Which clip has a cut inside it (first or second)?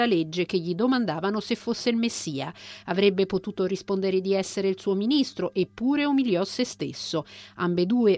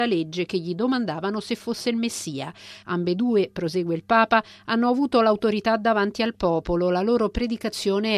second